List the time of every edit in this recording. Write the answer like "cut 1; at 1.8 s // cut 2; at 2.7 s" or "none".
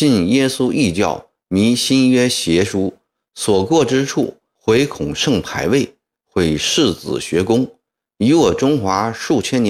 none